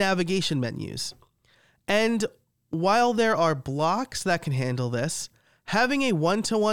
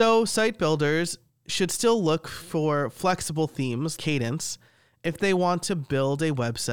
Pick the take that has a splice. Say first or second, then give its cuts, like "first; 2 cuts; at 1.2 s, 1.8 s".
second; 1 cut; at 4.0 s